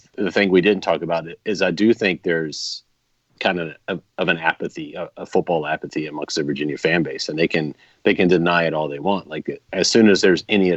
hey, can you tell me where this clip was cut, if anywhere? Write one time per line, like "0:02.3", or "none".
0:09.7